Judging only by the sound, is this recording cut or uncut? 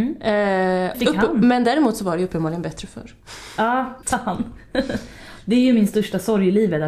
cut